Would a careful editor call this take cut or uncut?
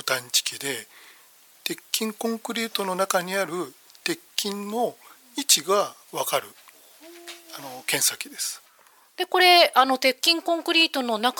uncut